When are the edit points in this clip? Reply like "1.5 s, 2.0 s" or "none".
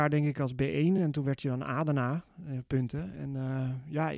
none